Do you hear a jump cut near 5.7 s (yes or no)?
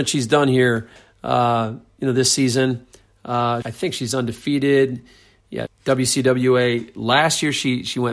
yes